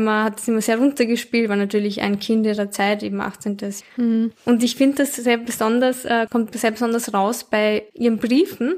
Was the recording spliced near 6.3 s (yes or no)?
yes